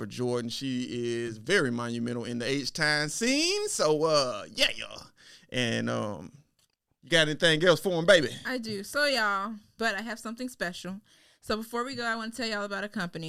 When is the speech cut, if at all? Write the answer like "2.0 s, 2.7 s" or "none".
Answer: 9.8 s